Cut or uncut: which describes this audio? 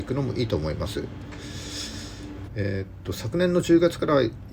cut